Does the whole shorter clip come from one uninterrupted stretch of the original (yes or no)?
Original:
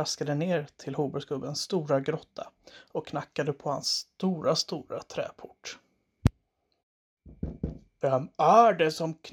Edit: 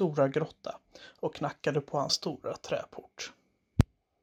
no